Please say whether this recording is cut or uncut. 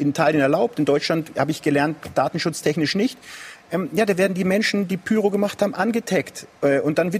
uncut